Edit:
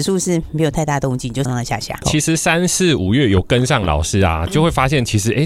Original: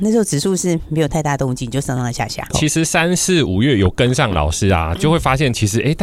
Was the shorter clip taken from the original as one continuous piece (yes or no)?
no